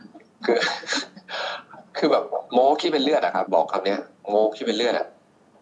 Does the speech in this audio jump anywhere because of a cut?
yes; 1 cut; at 3.5 s

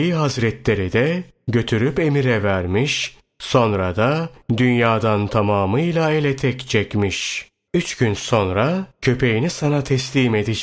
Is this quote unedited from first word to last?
no; 1 cut; at 7.7 s

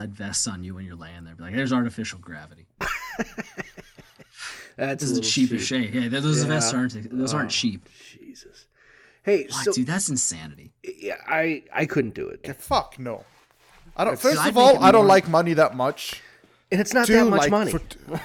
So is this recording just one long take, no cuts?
no; 1 cut; at 12.4 s

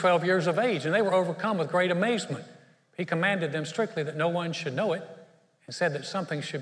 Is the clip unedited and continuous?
yes; 0 cuts

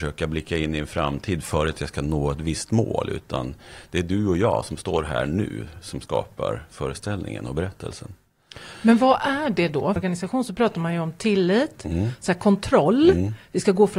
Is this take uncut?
no; 1 cut; at 10.0 s

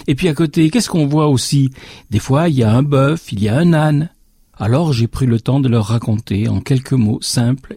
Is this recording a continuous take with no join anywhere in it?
no; 1 cut; at 4.5 s

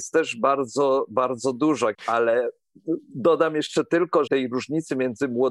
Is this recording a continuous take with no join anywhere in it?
no; 2 cuts; at 1.9 s, 4.3 s

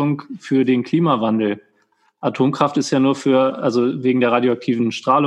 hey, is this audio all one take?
yes; 0 cuts

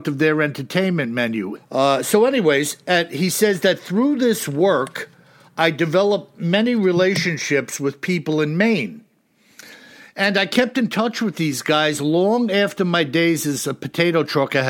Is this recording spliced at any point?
yes; 1 cut; at 1.6 s

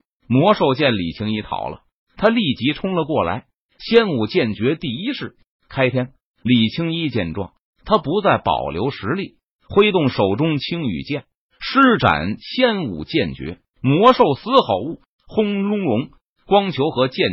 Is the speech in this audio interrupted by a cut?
yes; 2 cuts; at 13.7 s, 15.2 s

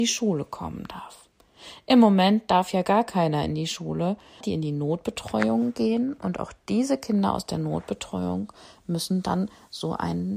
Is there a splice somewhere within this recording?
yes; 1 cut; at 4.4 s

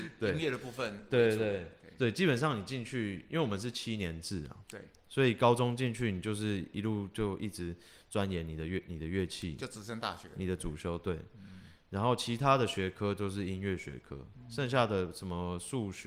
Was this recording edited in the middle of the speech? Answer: no; 0 cuts

